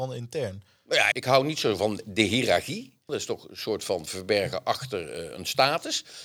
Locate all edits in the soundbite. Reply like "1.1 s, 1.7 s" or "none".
1.1 s, 3.1 s